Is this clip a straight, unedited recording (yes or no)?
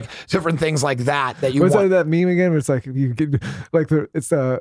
yes